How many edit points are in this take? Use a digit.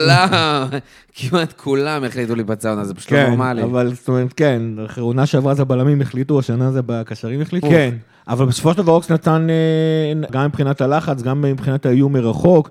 2